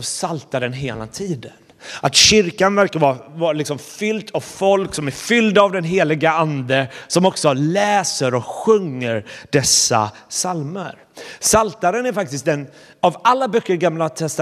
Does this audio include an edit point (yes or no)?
no